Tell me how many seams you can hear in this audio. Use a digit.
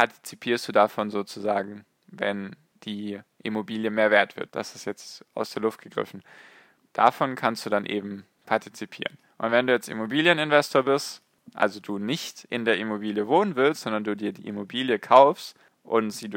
1